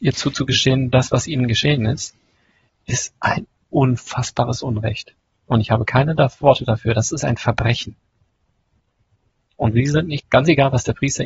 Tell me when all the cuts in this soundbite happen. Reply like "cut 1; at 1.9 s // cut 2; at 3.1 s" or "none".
cut 1; at 10.2 s